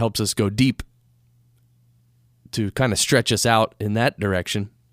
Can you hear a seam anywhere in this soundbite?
no; 0 cuts

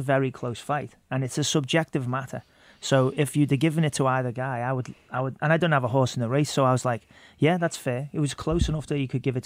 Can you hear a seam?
no; 0 cuts

